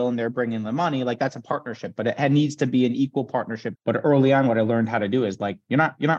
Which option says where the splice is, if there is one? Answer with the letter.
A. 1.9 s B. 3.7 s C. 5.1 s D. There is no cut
B